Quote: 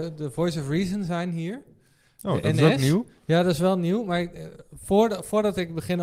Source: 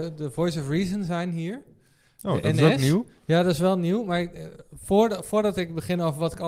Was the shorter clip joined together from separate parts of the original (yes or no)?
no